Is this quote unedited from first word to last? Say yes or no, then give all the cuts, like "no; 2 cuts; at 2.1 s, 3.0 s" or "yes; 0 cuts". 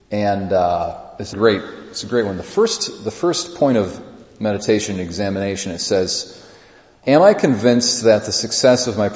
no; 2 cuts; at 1.3 s, 7.0 s